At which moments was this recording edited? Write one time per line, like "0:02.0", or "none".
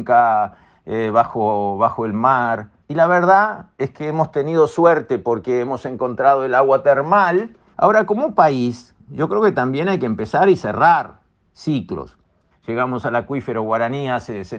0:02.8
0:07.7
0:12.5